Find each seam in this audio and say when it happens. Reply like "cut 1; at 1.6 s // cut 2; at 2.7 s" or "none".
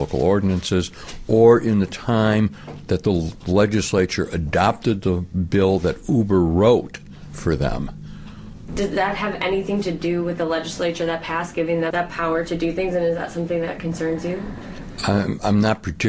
cut 1; at 8.7 s // cut 2; at 11.9 s